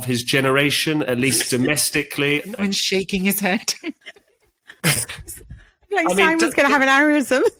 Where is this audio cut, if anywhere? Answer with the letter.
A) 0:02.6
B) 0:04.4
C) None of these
A